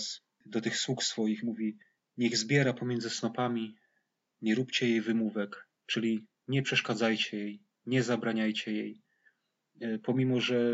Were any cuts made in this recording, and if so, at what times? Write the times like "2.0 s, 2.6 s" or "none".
none